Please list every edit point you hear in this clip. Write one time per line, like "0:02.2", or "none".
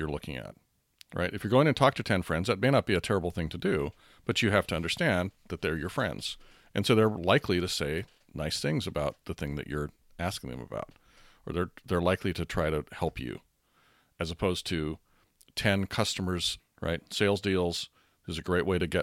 0:16.6